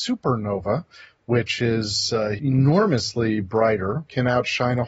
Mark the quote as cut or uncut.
uncut